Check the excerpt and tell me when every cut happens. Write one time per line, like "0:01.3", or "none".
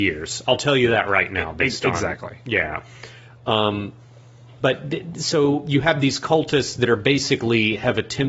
none